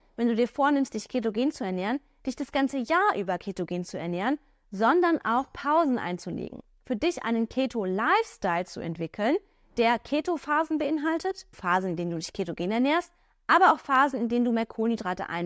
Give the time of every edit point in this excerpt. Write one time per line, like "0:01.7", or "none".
0:11.5